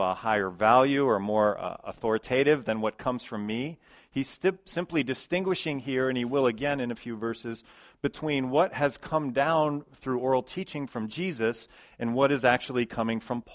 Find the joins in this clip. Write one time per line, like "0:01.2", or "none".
none

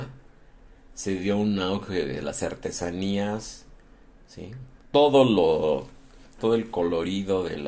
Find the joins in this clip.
0:04.8
0:06.4

